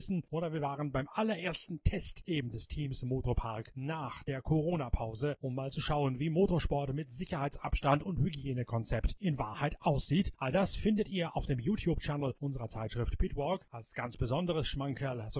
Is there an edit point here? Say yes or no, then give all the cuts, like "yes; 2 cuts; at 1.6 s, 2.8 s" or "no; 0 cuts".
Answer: no; 0 cuts